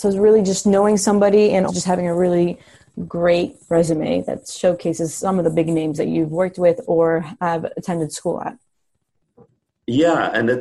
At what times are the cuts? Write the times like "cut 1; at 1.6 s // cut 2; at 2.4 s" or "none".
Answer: cut 1; at 1.7 s